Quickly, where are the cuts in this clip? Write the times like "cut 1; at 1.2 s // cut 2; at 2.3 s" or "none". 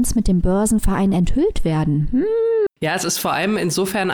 cut 1; at 2.7 s